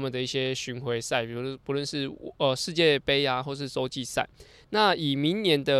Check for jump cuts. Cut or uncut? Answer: uncut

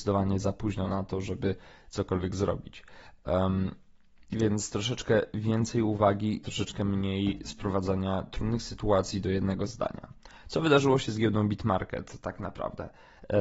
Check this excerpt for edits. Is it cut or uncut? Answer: uncut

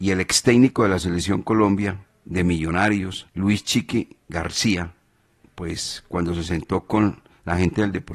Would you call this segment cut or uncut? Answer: cut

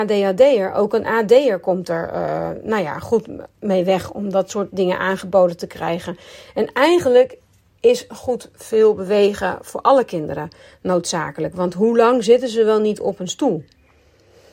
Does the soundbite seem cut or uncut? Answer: uncut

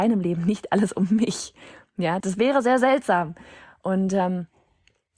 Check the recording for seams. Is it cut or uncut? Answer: cut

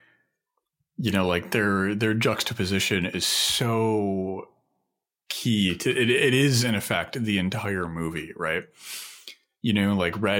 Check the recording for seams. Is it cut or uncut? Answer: uncut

